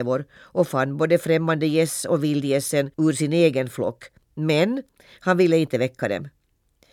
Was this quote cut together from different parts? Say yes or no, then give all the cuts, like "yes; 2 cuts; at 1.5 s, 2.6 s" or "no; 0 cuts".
yes; 1 cut; at 2.9 s